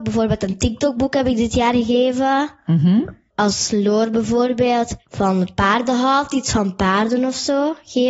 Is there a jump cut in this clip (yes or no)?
no